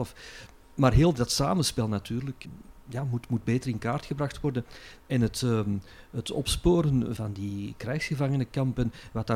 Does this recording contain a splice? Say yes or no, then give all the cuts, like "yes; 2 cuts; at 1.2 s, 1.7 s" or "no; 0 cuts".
no; 0 cuts